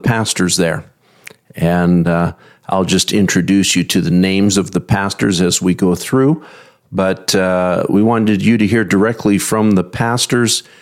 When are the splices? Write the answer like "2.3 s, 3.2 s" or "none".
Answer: none